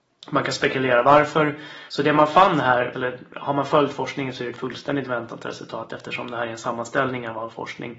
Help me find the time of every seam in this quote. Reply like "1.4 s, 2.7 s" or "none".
1.9 s, 2.9 s